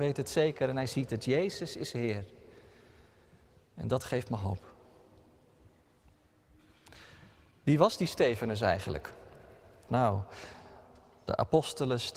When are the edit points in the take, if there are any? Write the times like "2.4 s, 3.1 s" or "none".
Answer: 9.9 s